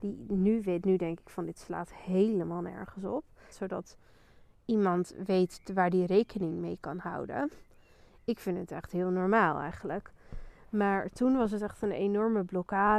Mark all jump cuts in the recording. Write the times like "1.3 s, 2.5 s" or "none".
3.5 s